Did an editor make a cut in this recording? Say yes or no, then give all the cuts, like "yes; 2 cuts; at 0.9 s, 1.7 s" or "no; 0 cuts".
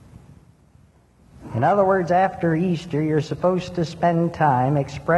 no; 0 cuts